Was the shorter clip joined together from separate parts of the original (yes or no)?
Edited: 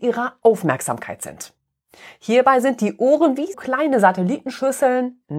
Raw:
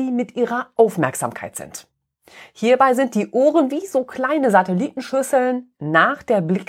yes